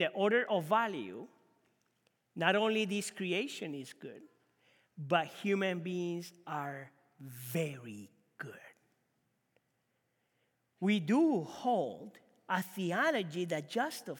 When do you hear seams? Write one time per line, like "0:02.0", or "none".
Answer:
none

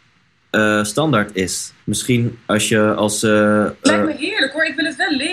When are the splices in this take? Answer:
0:01.8

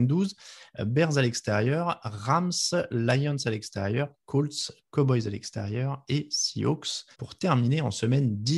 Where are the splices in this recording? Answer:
0:07.1

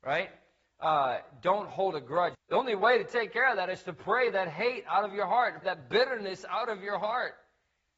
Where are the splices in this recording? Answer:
0:02.3
0:05.6

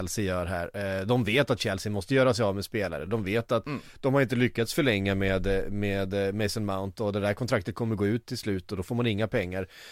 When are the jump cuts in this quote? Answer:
none

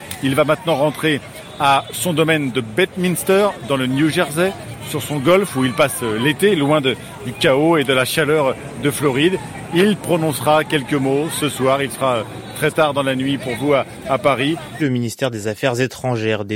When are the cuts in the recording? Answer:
0:14.8

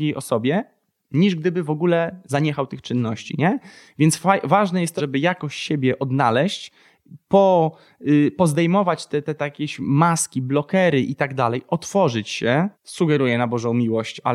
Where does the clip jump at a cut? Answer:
0:05.0
0:12.7

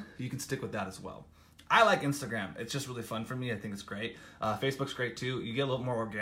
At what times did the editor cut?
none

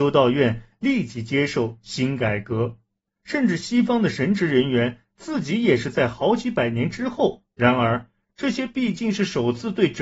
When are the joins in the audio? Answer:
0:07.5

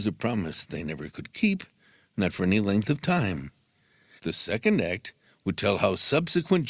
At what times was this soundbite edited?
0:04.2

